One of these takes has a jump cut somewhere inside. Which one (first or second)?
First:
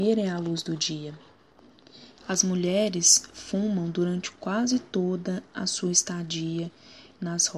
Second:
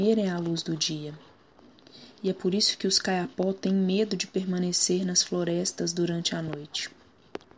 first